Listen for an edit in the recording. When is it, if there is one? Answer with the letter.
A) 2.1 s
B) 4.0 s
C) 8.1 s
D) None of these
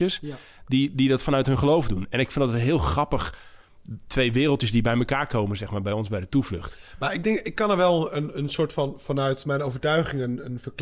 D